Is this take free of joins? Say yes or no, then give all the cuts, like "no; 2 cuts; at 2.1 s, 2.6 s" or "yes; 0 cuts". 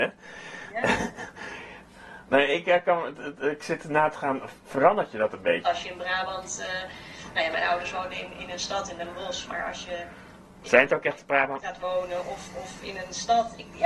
no; 2 cuts; at 5.6 s, 11.6 s